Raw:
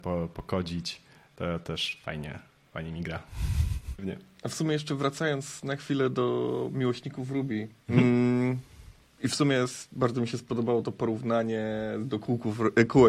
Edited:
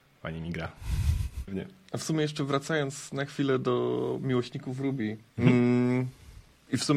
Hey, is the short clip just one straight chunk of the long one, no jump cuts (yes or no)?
yes